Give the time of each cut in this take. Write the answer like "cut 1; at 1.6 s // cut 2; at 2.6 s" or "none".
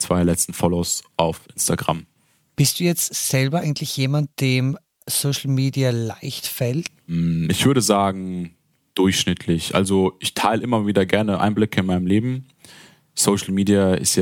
none